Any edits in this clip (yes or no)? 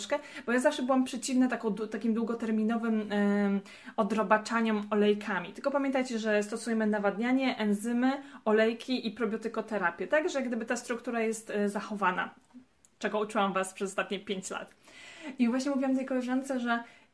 no